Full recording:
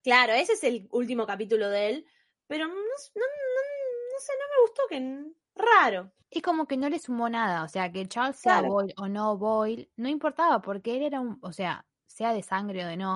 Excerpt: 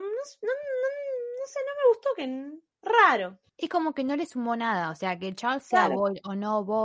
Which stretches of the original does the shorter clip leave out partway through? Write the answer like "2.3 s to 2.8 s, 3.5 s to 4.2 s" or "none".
none